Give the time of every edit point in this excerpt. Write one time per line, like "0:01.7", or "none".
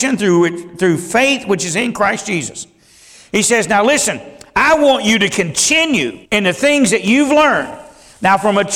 0:06.3